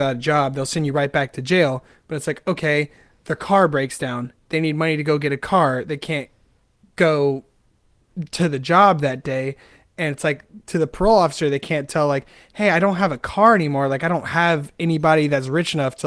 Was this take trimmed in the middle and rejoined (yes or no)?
no